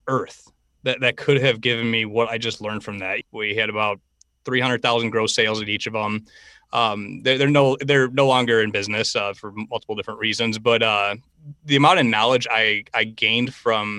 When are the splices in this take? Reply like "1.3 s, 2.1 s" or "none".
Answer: 3.2 s